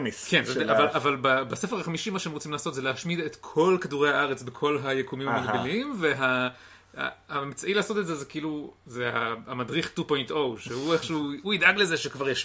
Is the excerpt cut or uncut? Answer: uncut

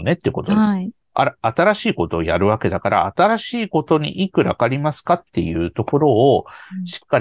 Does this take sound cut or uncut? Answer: cut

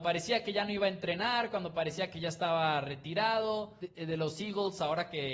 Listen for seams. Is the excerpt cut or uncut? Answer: cut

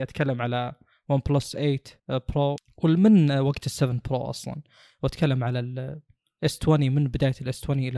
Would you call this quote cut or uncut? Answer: cut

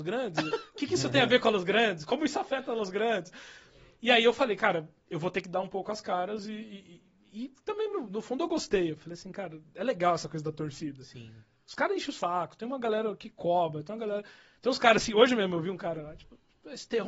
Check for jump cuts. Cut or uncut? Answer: uncut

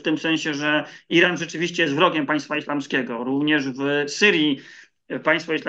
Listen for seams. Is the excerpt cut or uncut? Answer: uncut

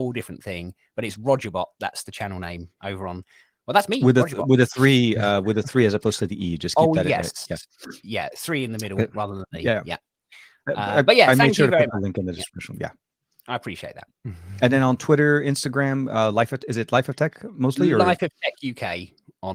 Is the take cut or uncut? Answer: uncut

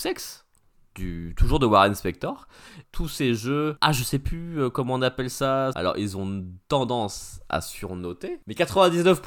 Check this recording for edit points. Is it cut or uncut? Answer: cut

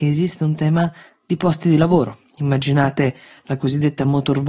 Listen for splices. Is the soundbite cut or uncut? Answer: uncut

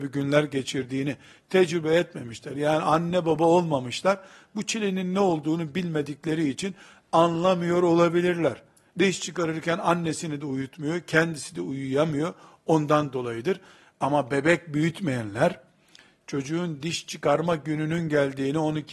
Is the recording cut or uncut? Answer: cut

